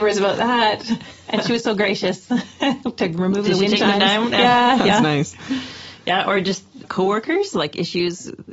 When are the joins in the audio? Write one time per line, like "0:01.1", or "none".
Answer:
0:06.8

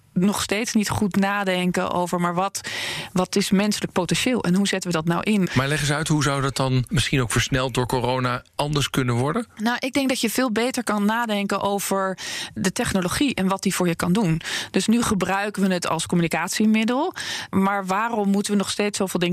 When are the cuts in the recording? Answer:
0:05.5

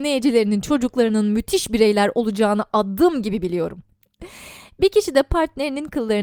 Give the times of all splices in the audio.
0:04.0

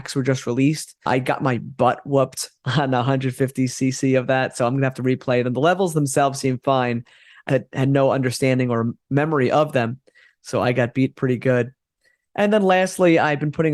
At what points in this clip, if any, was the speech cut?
0:07.5

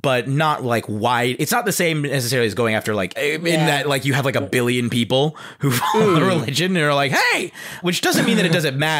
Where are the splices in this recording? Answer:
0:03.2
0:07.8

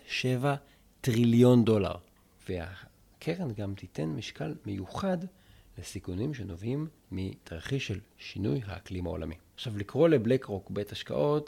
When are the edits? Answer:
0:02.4
0:07.0
0:09.5

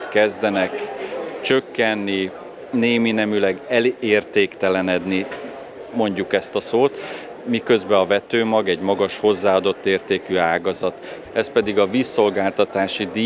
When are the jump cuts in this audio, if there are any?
0:11.3

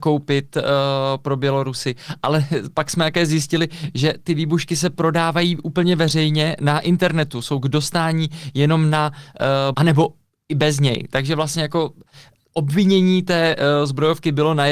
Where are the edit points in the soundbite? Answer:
0:09.7

